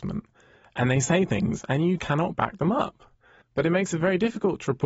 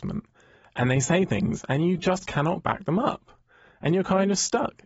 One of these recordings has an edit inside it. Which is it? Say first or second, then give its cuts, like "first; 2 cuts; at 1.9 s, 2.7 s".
first; 2 cuts; at 2.0 s, 3.4 s